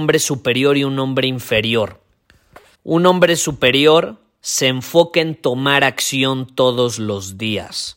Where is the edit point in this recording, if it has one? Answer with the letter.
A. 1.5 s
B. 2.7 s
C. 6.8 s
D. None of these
B